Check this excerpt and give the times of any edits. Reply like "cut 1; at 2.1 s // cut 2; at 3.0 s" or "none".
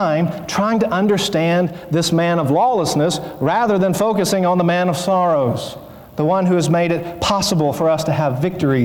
none